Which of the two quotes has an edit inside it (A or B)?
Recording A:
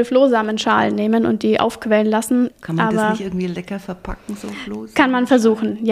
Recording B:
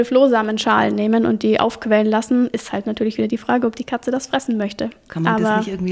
A